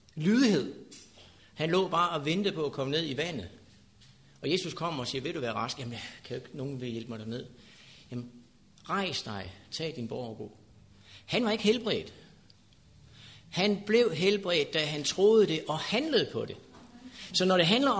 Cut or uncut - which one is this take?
cut